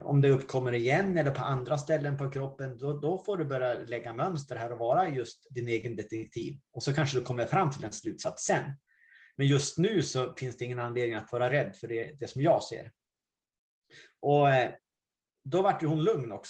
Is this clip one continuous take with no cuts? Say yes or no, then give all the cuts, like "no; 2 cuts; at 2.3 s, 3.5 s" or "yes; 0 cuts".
yes; 0 cuts